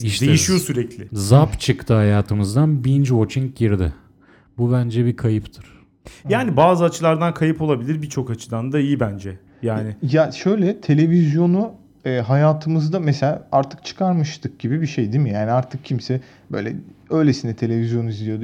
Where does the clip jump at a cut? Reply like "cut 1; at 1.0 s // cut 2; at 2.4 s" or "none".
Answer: none